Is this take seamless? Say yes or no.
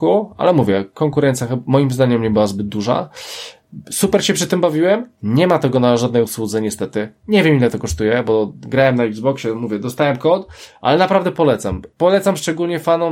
yes